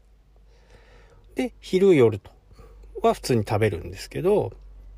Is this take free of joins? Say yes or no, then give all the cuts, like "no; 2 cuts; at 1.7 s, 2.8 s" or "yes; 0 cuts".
yes; 0 cuts